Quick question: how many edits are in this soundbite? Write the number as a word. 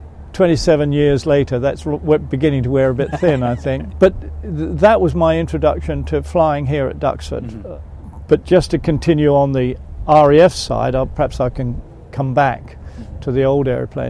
one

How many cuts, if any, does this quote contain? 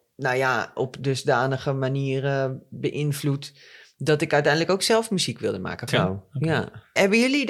one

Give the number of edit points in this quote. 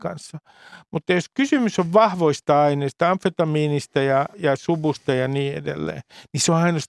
one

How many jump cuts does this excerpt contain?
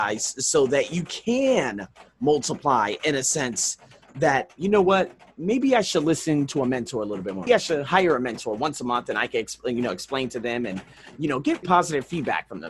two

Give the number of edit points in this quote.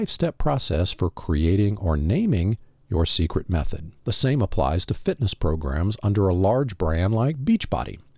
one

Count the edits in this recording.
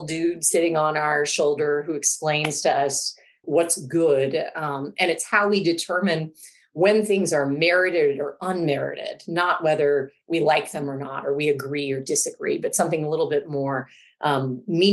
one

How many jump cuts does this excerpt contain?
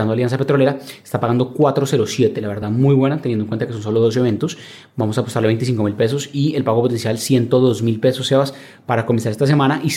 zero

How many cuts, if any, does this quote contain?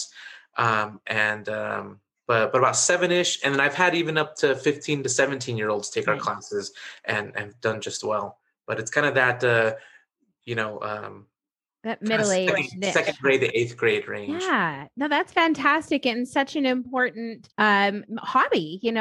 one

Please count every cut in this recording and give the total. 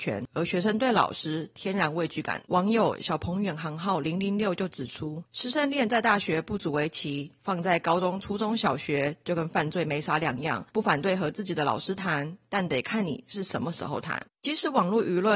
one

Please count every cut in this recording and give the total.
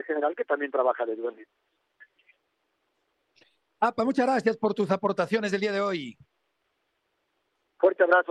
zero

